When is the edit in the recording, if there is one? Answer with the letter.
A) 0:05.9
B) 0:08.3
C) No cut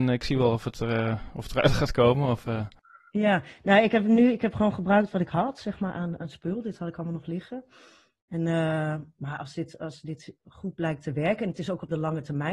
C